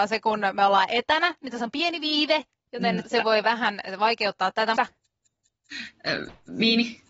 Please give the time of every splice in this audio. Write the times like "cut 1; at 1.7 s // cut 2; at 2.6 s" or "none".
cut 1; at 3.0 s // cut 2; at 4.8 s